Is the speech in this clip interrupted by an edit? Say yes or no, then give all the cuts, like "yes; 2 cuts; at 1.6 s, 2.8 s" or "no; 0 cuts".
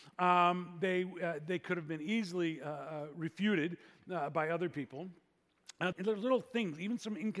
yes; 1 cut; at 5.9 s